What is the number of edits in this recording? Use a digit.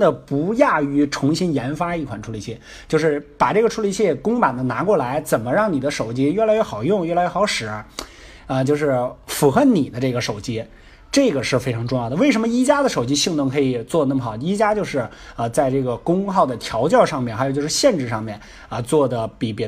0